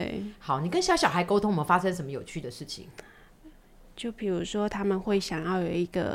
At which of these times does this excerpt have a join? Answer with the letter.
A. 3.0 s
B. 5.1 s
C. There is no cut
C